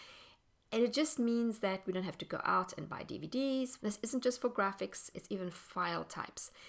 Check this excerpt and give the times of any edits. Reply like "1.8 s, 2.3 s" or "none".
3.8 s, 5.1 s